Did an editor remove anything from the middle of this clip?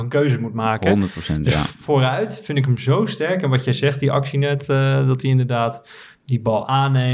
no; 0 cuts

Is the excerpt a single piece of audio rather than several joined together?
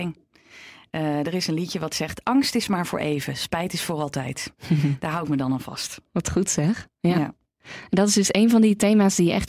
yes; 0 cuts

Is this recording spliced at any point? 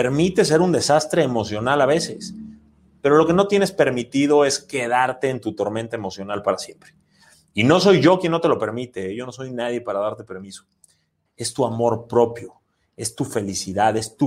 yes; 1 cut; at 11.3 s

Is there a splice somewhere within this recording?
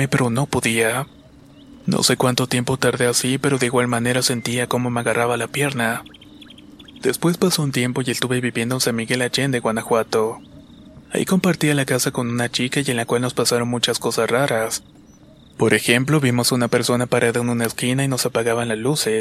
no; 0 cuts

